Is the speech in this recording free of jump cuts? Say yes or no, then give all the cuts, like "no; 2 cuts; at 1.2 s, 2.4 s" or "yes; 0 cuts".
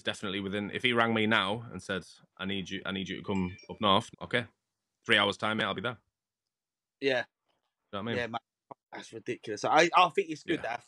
no; 2 cuts; at 4.1 s, 8.8 s